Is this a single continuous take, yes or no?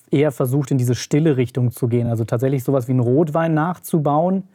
yes